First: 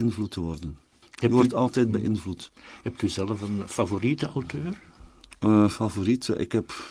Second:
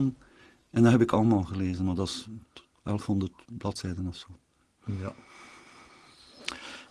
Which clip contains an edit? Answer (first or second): first